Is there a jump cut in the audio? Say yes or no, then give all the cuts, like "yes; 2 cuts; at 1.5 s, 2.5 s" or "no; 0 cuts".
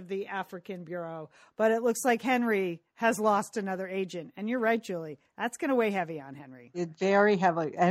no; 0 cuts